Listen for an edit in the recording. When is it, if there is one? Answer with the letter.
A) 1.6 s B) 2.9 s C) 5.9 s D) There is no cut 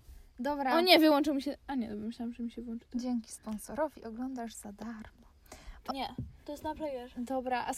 C